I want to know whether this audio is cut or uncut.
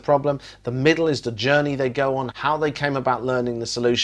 cut